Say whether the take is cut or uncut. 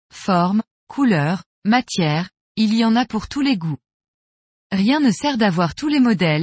uncut